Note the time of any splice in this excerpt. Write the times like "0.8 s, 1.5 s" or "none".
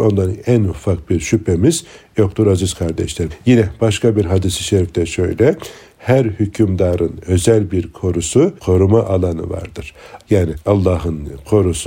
8.6 s, 10.2 s